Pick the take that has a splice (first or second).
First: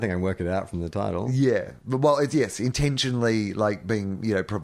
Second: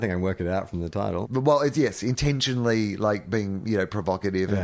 second